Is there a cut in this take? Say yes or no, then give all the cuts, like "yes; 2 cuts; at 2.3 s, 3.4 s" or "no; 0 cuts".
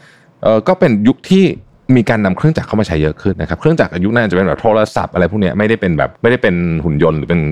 yes; 2 cuts; at 3.3 s, 6.2 s